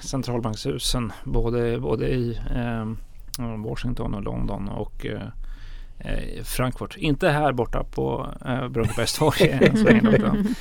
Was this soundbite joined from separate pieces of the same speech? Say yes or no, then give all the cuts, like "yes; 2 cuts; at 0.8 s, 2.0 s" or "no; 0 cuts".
no; 0 cuts